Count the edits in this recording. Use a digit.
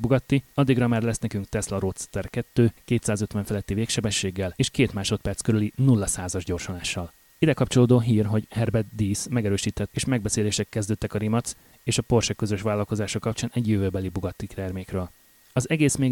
1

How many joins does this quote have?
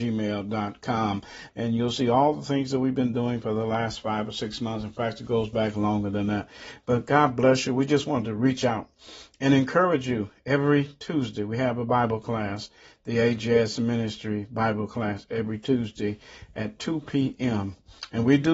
1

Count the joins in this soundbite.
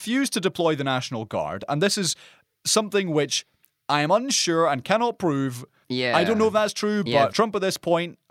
2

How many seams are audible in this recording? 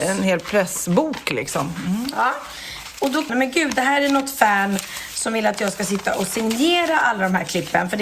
1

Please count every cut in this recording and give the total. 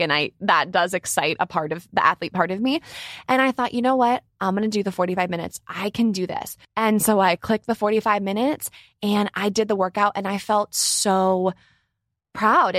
1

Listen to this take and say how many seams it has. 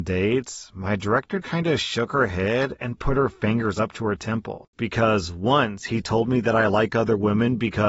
2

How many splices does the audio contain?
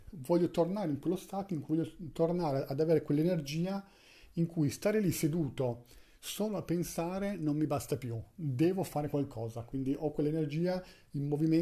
0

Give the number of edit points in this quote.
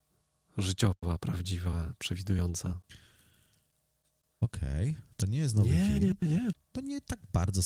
2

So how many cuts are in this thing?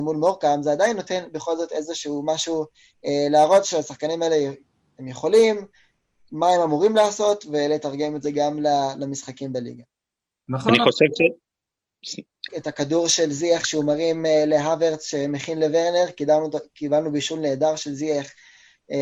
1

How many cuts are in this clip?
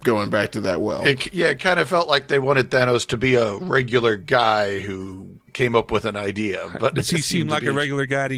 1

